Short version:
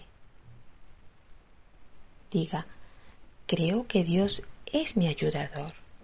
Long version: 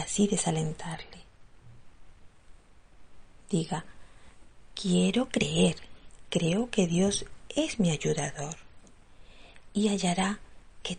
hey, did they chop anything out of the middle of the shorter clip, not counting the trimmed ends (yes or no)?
yes